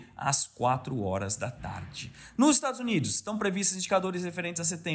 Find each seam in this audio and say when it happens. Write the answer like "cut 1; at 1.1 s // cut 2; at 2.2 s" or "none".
none